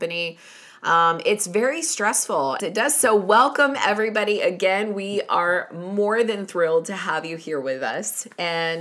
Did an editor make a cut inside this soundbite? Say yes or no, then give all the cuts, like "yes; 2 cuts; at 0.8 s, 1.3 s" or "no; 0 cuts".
yes; 1 cut; at 2.6 s